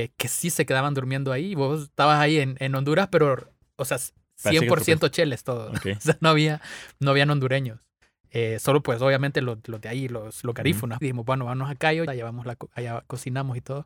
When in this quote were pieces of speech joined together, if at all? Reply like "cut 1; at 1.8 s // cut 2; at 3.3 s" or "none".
cut 1; at 11.0 s // cut 2; at 12.1 s